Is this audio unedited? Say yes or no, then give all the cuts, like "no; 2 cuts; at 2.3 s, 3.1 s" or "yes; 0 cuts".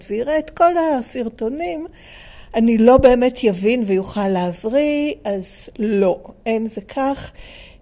yes; 0 cuts